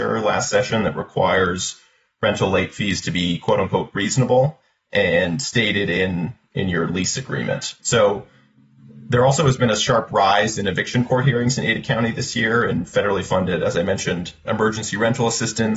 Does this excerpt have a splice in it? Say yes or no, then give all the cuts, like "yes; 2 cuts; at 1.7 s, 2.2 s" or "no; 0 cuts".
yes; 2 cuts; at 7.8 s, 14.4 s